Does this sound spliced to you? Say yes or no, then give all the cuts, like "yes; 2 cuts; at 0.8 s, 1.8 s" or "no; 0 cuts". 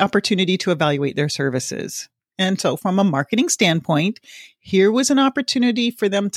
yes; 1 cut; at 2.3 s